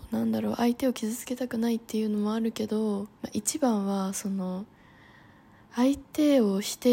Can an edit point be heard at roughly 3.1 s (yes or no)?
yes